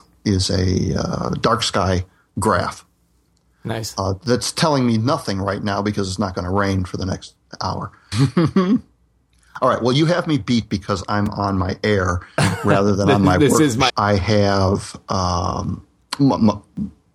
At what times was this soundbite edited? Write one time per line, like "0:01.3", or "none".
0:08.1
0:13.9